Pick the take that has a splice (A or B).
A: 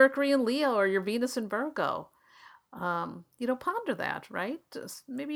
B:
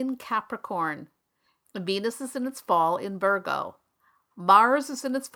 B